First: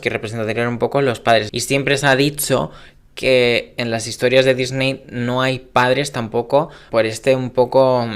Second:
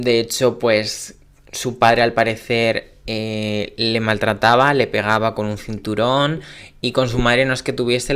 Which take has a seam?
first; 2 cuts; at 1.5 s, 6.9 s

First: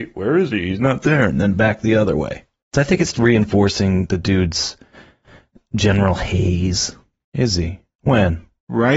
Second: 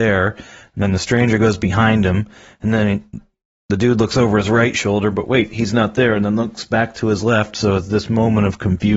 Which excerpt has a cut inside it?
first; 2 cuts; at 3.1 s, 7.2 s

